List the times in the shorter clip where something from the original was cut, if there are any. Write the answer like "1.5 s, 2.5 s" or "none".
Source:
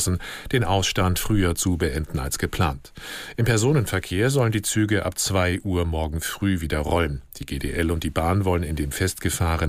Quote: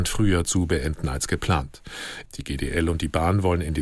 2.3 s